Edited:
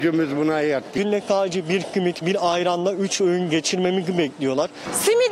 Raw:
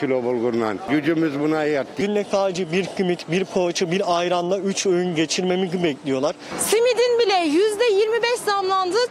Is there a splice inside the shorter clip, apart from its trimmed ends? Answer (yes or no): yes